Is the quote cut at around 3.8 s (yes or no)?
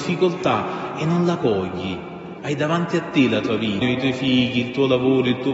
yes